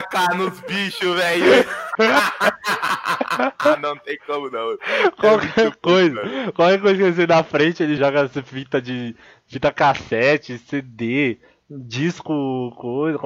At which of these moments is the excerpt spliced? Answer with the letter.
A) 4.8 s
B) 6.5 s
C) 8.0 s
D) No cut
C